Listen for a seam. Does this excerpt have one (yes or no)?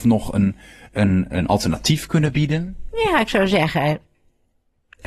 no